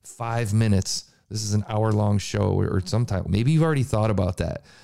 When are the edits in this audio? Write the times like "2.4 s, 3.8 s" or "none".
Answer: 3.3 s